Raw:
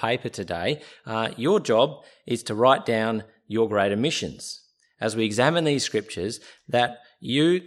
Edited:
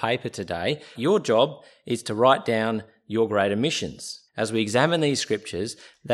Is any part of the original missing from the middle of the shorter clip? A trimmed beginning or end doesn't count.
yes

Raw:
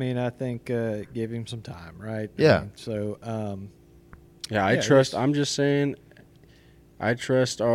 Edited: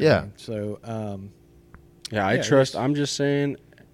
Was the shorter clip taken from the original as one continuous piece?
yes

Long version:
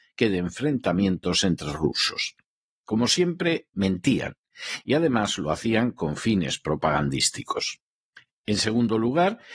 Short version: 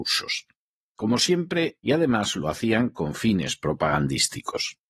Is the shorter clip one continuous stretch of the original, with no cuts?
no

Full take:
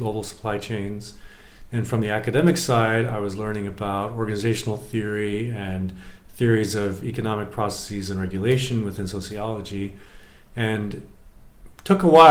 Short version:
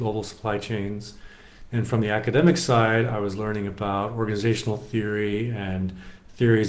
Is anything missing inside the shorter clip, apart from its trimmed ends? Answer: no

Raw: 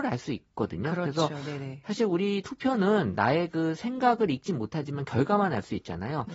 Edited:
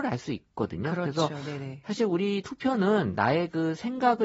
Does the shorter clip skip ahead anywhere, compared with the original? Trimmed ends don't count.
no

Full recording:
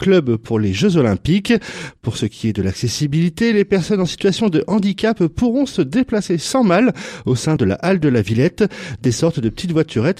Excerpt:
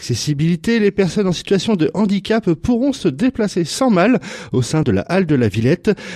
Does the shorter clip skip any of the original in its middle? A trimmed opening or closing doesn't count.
no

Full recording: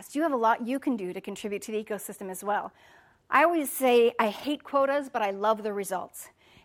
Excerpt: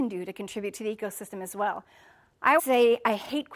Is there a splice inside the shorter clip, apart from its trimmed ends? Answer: yes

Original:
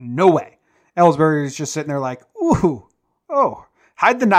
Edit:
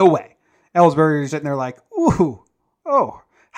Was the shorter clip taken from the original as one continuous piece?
no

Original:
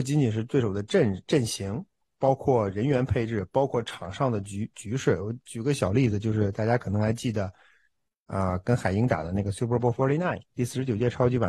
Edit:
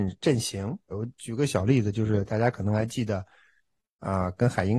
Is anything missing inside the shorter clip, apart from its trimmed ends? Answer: yes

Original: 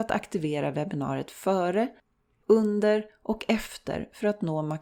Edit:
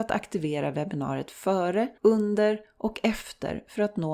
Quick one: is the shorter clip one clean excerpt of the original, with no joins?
no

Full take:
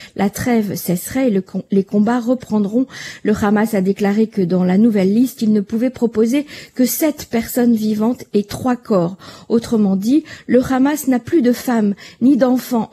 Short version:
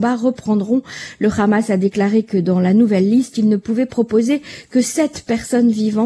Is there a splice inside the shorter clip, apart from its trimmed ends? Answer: no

